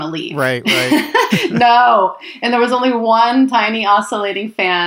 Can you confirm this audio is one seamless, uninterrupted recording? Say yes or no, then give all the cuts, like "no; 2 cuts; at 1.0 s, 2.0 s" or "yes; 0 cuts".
no; 1 cut; at 1.3 s